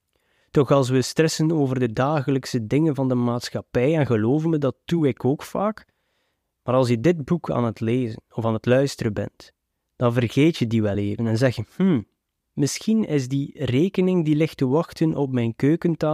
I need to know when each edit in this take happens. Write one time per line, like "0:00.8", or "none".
none